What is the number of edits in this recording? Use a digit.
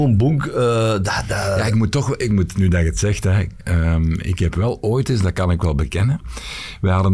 0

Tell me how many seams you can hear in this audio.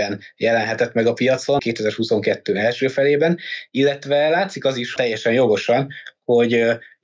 2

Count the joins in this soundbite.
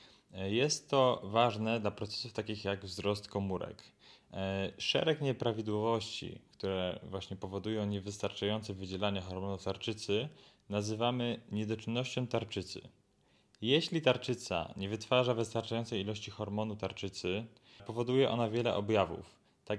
1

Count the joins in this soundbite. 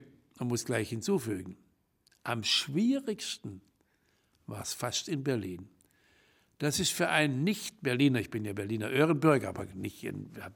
0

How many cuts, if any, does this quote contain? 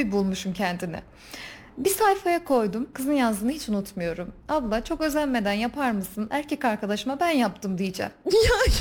1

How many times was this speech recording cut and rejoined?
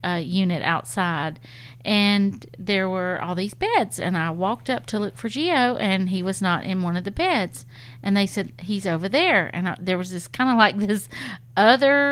0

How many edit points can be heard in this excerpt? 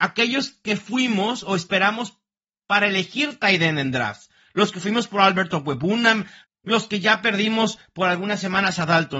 1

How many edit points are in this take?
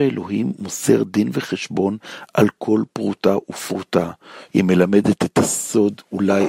1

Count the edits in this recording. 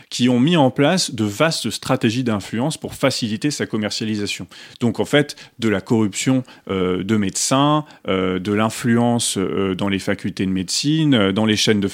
0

